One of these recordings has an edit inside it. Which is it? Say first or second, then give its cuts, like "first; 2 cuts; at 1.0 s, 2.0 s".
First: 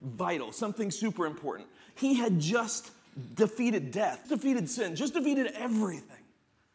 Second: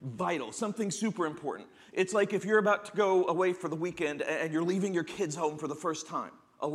first; 2 cuts; at 1.9 s, 4.2 s